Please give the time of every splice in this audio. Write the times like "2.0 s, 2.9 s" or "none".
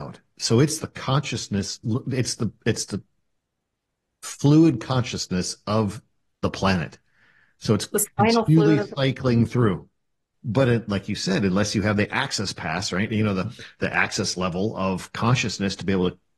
10.3 s